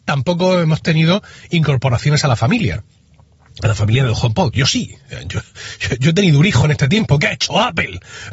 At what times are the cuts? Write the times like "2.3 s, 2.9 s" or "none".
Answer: 4.5 s